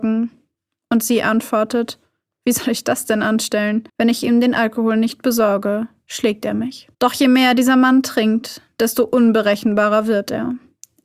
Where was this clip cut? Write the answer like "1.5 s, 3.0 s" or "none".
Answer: 3.9 s, 6.9 s